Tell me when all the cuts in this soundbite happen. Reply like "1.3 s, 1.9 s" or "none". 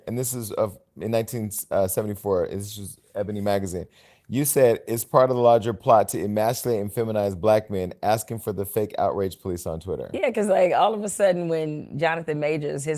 none